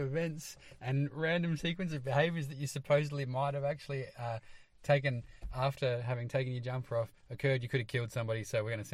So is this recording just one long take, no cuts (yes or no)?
yes